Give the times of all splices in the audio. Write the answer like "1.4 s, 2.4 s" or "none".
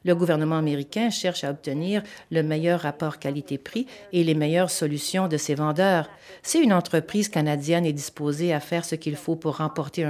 none

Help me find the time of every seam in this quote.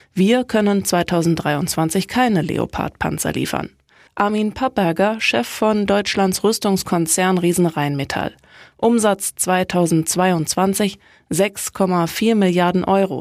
4.1 s

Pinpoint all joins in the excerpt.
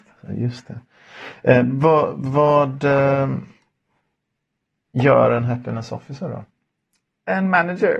none

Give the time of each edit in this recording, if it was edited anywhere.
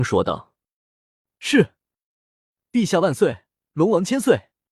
none

